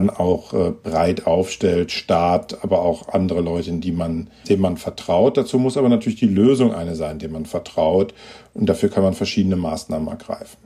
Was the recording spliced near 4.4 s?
yes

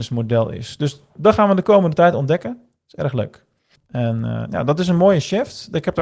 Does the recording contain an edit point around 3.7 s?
yes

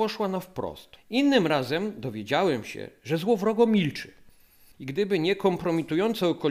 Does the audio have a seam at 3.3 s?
no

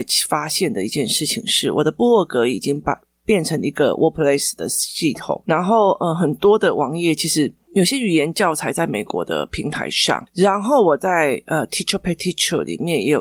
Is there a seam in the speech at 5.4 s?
yes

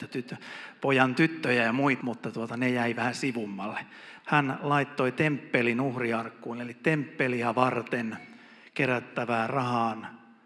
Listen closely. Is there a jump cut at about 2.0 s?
yes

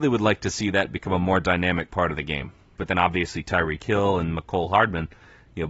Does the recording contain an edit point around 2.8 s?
yes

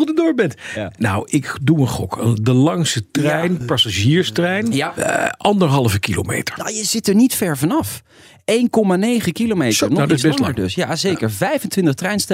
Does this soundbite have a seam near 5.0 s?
yes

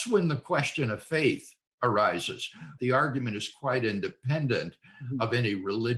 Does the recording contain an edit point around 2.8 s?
yes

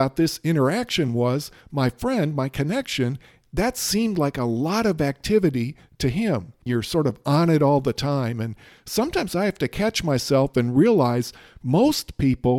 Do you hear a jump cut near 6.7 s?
yes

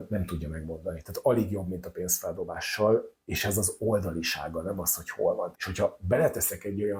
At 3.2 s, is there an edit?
no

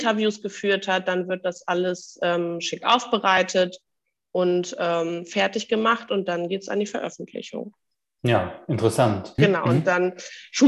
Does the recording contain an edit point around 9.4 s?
yes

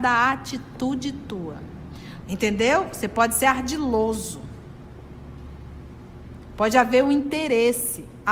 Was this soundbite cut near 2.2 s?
yes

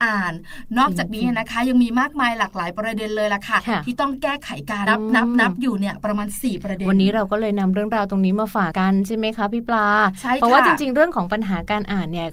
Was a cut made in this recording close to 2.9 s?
no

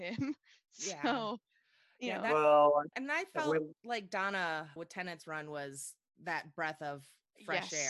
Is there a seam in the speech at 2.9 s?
yes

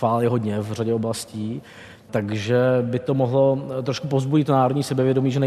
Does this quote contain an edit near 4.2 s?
no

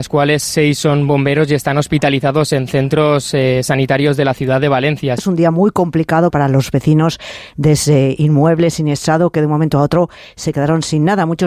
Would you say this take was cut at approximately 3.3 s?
no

